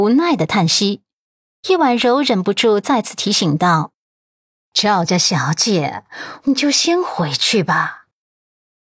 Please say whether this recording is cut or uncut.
cut